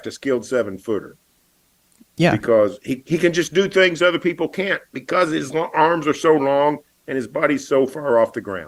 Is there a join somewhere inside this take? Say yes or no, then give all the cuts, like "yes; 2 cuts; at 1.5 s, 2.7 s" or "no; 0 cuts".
no; 0 cuts